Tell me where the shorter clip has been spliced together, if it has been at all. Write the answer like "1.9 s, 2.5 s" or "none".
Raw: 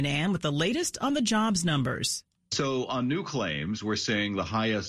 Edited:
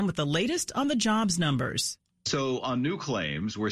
none